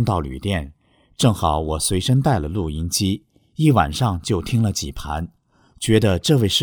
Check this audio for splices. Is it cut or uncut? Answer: uncut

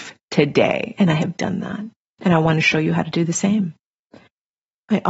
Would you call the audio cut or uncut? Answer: uncut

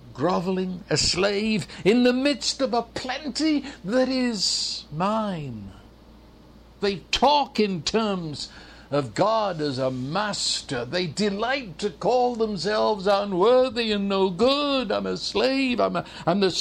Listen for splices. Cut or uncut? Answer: cut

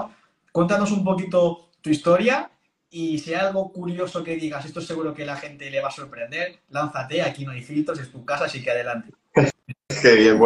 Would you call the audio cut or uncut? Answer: uncut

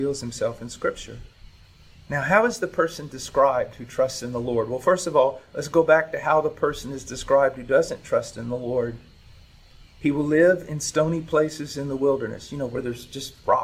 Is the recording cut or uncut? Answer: uncut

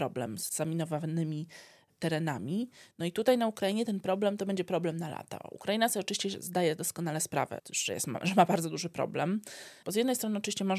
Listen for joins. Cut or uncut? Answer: cut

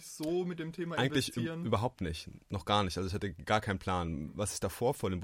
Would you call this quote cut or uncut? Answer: uncut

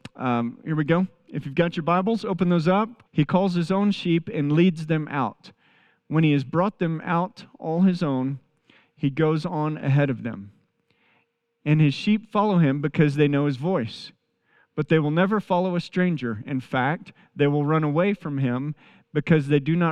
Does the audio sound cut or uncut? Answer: cut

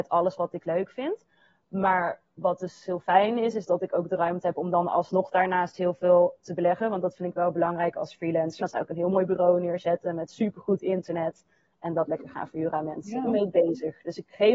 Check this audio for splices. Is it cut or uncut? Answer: cut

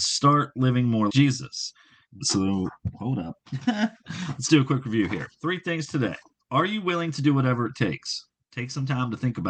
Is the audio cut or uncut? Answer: cut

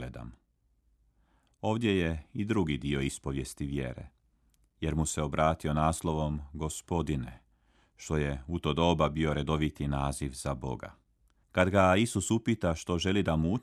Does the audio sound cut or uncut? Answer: cut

